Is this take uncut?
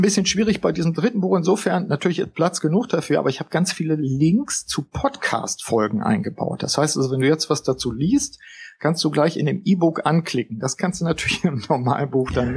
yes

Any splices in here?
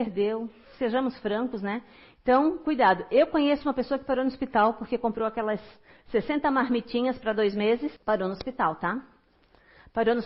yes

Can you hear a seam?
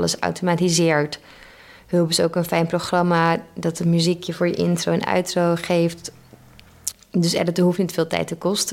yes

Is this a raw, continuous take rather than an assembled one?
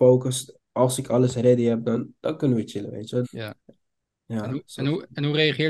no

